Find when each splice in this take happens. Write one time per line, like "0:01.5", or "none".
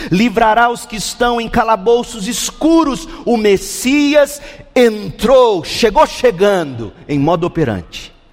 none